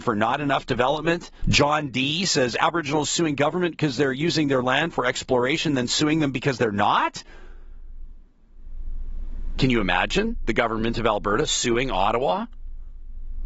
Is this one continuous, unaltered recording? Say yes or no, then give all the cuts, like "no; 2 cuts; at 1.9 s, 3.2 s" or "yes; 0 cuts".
no; 2 cuts; at 1.4 s, 9.6 s